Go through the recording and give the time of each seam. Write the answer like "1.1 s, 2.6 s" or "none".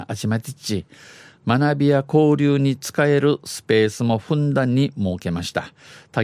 none